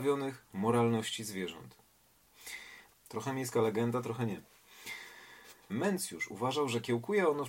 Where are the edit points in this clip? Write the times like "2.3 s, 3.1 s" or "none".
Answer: 2.9 s, 5.7 s